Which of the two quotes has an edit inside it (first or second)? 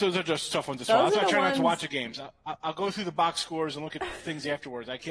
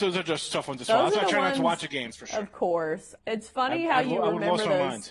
second